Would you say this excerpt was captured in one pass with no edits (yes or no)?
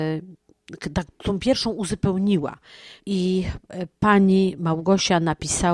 no